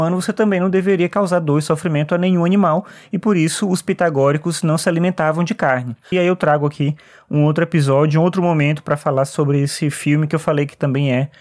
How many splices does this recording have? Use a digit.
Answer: 1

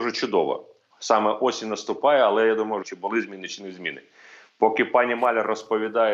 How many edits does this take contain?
2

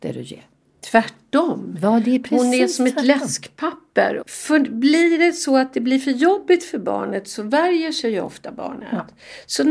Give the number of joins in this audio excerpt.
1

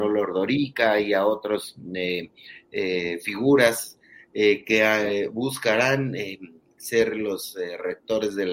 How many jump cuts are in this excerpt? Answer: 0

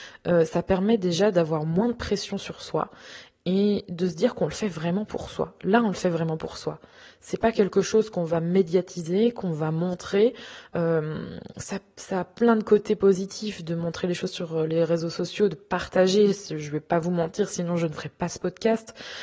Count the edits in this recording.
0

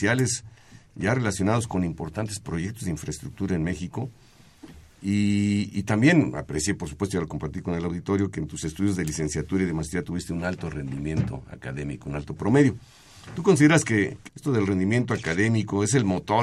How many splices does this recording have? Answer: 1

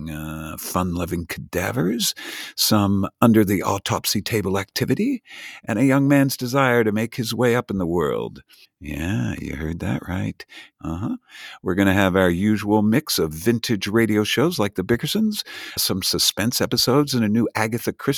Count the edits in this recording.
3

